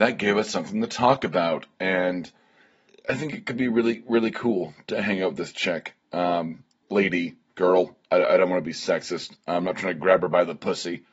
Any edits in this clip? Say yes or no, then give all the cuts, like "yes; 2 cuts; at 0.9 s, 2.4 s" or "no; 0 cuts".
no; 0 cuts